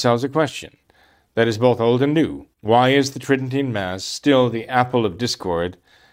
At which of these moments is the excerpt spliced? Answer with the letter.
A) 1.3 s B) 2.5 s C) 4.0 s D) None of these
B